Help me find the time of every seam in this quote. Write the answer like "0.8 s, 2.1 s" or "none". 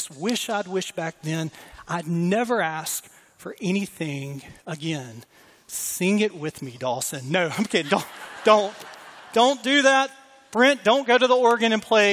none